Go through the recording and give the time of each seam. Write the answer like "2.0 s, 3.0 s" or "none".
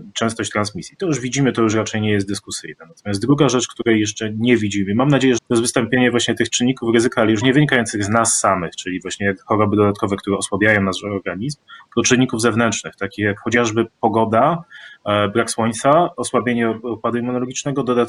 5.4 s